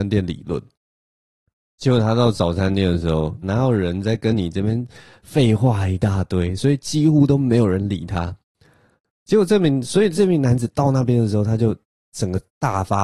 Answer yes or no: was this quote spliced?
yes